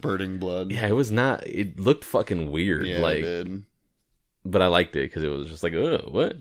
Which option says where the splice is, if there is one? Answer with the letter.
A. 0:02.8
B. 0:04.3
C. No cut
C